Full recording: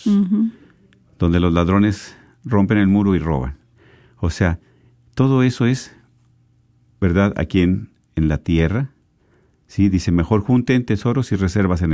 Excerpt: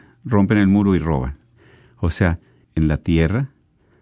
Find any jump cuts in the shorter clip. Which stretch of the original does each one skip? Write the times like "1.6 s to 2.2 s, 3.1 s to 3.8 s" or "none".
4.8 s to 8.0 s